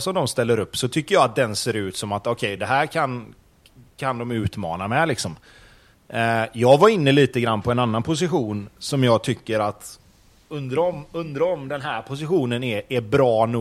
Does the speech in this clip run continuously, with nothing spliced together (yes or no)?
yes